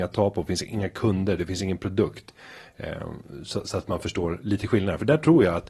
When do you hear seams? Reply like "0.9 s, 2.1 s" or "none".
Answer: none

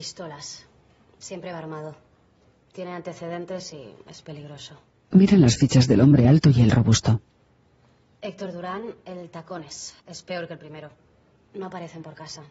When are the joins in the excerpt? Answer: 10.0 s

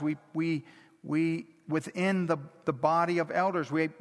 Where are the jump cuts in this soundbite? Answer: none

